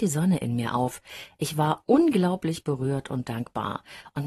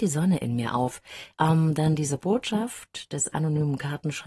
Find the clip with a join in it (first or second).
second